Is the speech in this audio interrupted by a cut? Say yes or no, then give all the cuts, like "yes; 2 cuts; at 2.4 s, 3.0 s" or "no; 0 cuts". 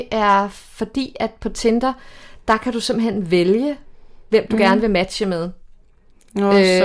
no; 0 cuts